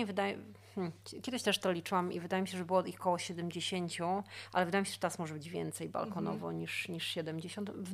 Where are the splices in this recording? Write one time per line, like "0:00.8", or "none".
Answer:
none

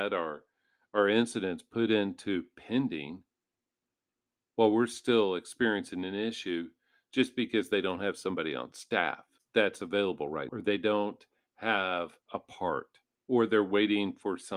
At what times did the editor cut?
0:09.4
0:10.5
0:12.2

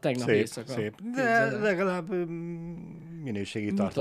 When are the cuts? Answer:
none

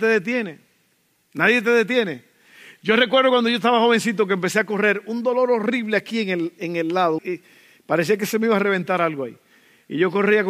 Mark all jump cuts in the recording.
0:07.2

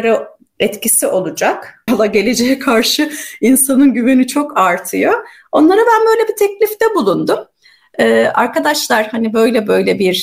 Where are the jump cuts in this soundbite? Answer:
0:01.9

